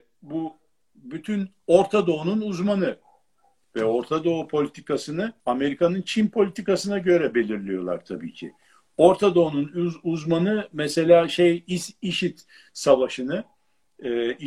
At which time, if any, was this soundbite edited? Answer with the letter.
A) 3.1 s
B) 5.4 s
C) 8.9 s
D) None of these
B